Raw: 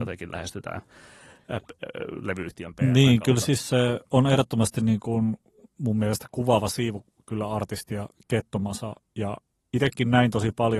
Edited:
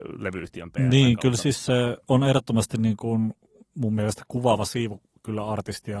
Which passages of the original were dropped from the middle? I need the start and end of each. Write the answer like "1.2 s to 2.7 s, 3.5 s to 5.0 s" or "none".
none